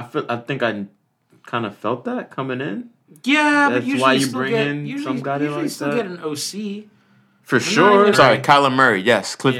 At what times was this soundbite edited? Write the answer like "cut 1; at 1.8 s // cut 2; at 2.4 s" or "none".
cut 1; at 8.1 s